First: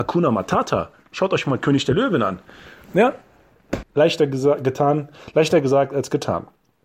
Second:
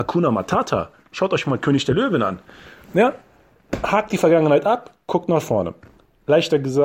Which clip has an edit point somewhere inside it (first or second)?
first